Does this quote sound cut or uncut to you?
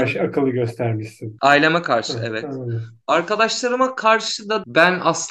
uncut